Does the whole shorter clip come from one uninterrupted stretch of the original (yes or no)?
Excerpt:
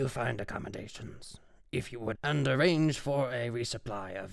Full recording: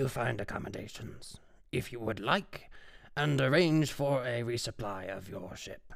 no